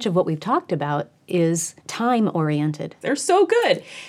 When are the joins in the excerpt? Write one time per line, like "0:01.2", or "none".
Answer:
0:01.8
0:03.0